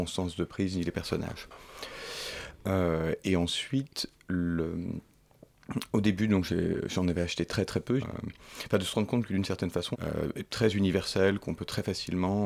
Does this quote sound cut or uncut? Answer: cut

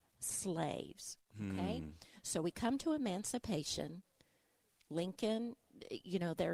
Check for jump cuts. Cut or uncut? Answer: uncut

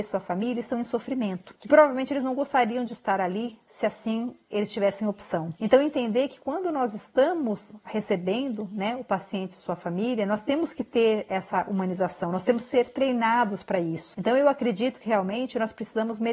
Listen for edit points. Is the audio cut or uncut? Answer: uncut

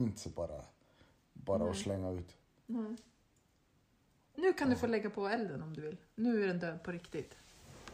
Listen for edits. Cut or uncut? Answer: uncut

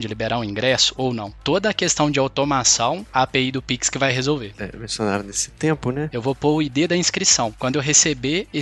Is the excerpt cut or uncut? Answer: cut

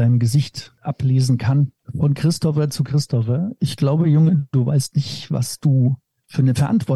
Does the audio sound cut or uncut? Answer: uncut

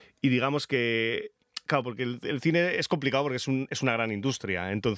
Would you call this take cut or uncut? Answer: uncut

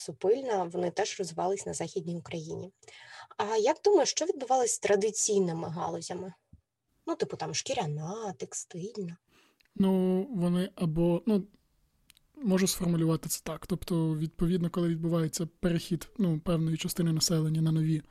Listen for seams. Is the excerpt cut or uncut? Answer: uncut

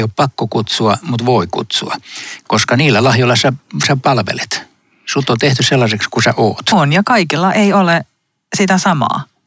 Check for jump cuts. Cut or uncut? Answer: uncut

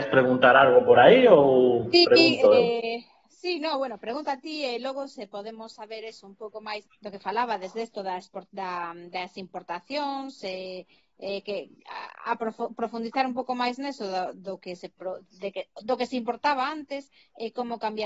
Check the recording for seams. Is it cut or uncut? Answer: cut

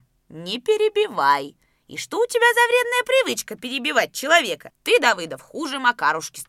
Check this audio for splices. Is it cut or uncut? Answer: uncut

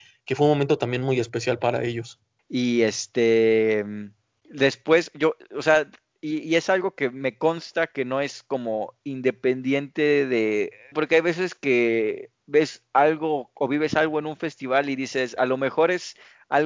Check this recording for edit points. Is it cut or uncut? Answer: cut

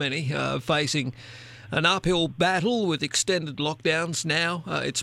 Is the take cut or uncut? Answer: uncut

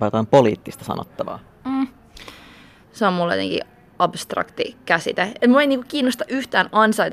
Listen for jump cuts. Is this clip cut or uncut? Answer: cut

